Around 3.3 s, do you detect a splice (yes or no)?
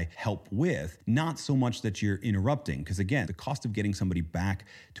yes